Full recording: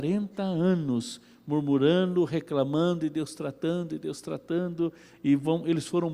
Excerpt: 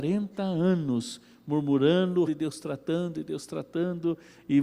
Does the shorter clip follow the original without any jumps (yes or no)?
no